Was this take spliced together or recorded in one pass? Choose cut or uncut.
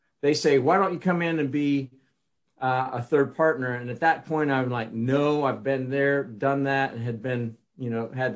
uncut